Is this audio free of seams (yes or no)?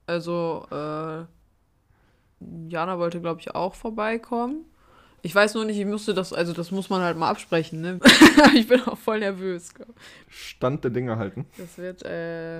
no